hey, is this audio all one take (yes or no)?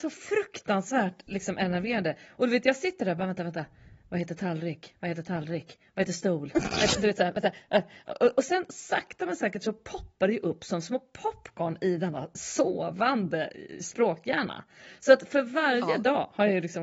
yes